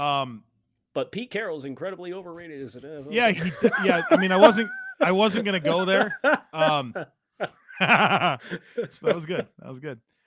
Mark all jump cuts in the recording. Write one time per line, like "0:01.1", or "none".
0:03.3

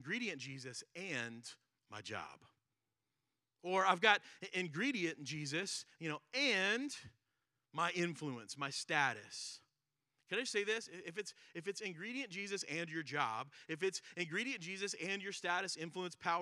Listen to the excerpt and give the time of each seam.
none

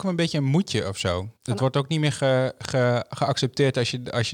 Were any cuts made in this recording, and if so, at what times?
0:01.4

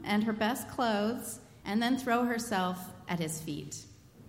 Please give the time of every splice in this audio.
0:01.6

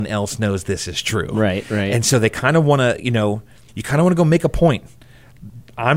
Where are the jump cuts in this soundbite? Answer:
0:03.7

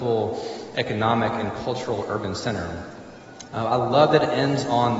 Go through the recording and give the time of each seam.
0:03.5

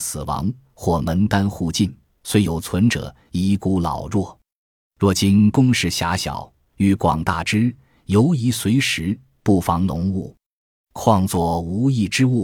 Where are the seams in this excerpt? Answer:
none

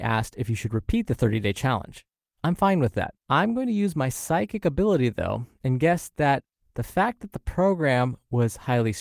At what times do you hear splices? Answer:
0:03.2

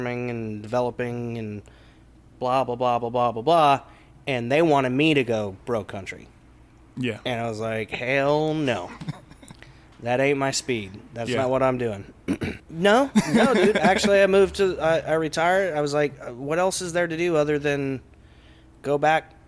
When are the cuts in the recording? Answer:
0:12.6

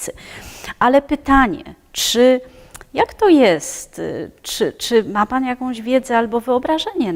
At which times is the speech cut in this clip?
none

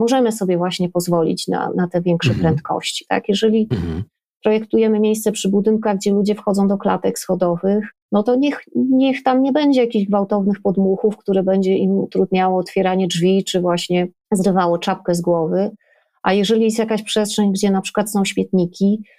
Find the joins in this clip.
none

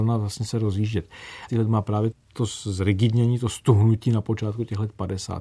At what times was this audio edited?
0:01.5

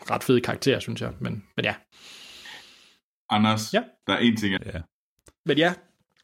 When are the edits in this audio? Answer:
0:04.6

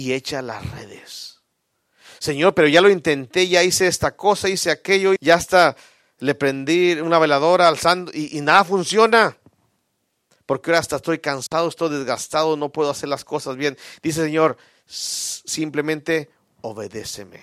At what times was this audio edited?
0:05.2
0:10.3

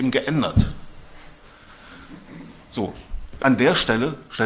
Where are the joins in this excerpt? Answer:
0:03.4

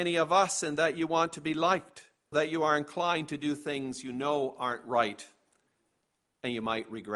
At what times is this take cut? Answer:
0:02.3

